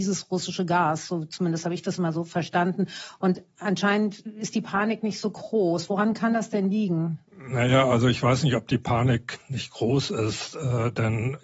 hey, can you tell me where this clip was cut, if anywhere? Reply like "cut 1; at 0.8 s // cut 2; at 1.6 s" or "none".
cut 1; at 7.3 s